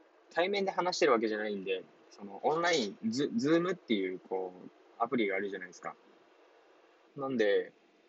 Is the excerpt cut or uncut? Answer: cut